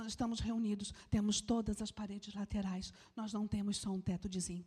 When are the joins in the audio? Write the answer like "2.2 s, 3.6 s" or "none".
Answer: none